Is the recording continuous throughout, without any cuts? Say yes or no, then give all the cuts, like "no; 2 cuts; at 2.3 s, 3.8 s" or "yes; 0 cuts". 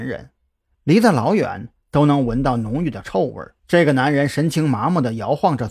no; 1 cut; at 3.6 s